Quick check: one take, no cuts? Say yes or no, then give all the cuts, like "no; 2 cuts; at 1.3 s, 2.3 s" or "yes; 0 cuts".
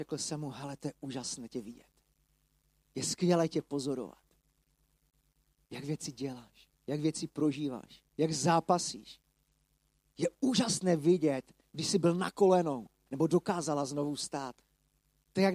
no; 3 cuts; at 6.8 s, 8.1 s, 13.1 s